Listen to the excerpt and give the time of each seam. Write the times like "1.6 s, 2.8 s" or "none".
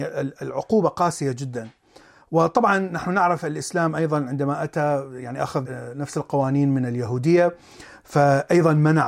5.6 s